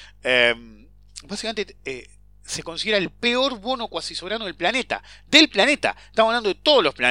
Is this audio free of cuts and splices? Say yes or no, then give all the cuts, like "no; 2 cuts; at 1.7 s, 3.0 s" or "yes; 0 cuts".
yes; 0 cuts